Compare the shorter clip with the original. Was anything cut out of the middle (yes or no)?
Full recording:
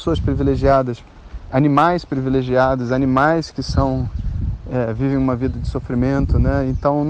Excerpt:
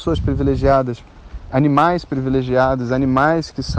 no